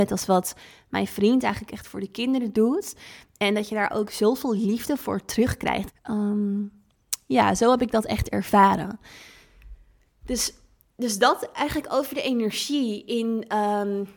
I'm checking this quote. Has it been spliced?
yes; 1 cut; at 5.9 s

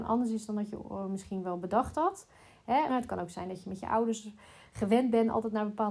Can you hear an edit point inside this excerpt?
yes; 1 cut; at 2.9 s

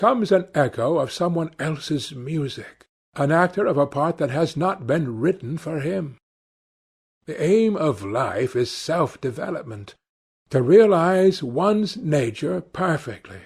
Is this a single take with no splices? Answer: yes; 0 cuts

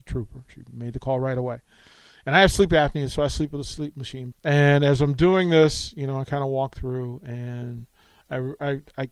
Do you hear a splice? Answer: yes; 1 cut; at 4.3 s

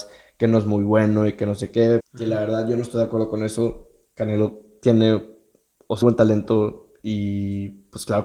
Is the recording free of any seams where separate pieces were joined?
no; 2 cuts; at 2.0 s, 6.0 s

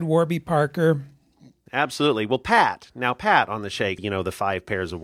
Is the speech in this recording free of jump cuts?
no; 2 cuts; at 1.7 s, 4.0 s

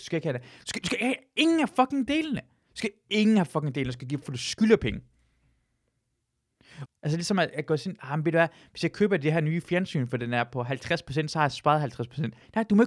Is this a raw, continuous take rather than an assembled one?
no; 2 cuts; at 4.2 s, 6.9 s

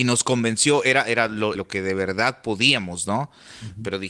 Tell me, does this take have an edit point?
yes; 1 cut; at 1.5 s

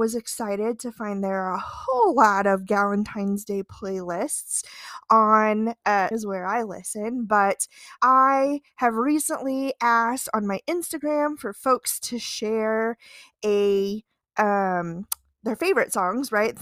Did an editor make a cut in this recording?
yes; 2 cuts; at 6.1 s, 8.0 s

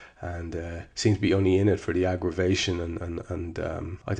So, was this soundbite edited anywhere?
yes; 1 cut; at 0.9 s

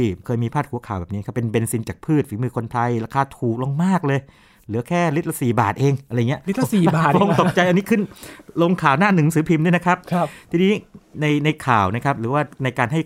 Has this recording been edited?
no; 0 cuts

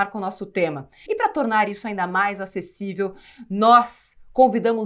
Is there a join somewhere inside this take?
yes; 1 cut; at 1.1 s

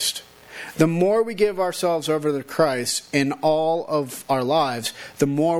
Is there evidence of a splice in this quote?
no; 0 cuts

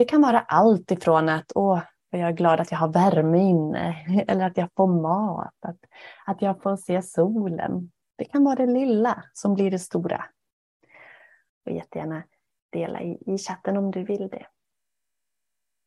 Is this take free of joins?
no; 1 cut; at 11.5 s

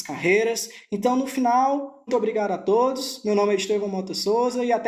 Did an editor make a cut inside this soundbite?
yes; 1 cut; at 2.1 s

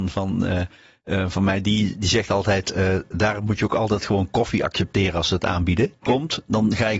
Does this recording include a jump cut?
yes; 1 cut; at 6.0 s

